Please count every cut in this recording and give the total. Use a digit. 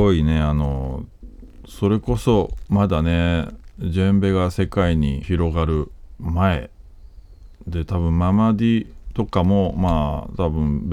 1